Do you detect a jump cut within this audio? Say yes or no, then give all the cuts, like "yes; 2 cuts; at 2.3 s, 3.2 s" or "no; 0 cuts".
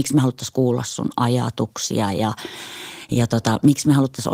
no; 0 cuts